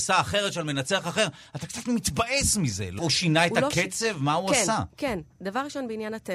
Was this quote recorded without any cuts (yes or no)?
no